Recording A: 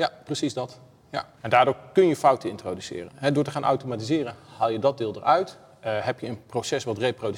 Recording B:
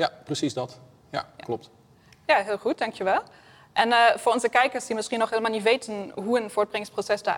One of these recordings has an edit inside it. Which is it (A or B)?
A